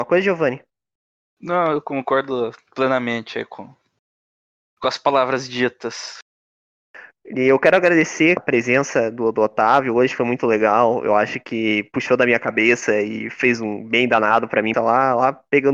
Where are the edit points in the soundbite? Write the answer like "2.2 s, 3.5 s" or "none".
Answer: 8.4 s, 14.7 s